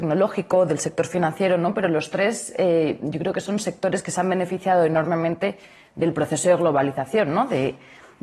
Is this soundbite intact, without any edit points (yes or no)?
yes